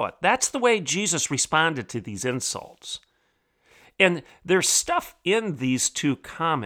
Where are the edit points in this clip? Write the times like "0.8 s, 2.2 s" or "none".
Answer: none

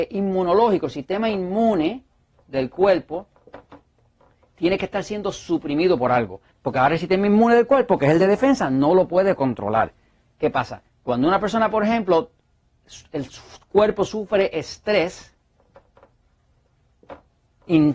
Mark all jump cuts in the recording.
6.5 s

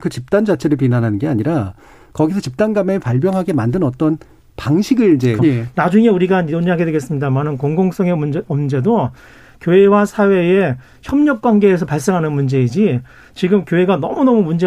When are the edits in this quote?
5.4 s

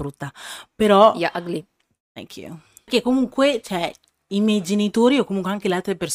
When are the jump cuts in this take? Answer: none

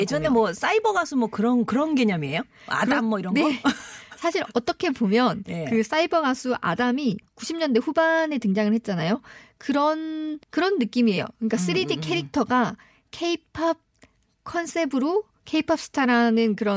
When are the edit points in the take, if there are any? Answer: 10.4 s

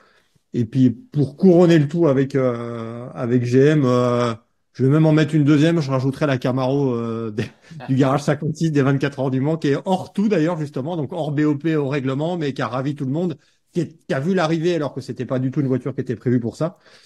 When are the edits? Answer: none

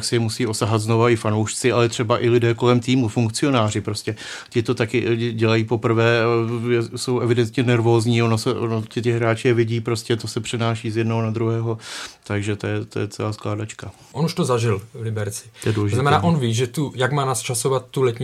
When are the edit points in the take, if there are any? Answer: 14.1 s

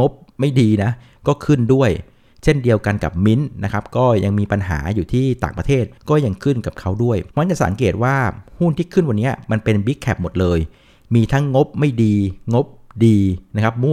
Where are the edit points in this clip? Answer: 6.0 s, 7.3 s

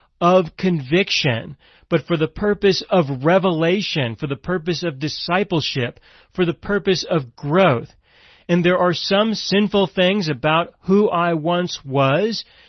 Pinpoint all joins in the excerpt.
none

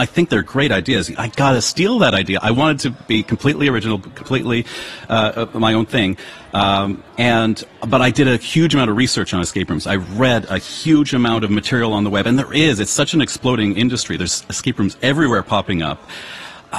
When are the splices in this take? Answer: 1.2 s, 7.1 s

